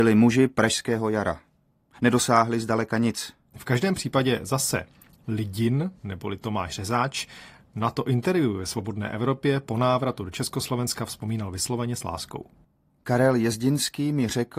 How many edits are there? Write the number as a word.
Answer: one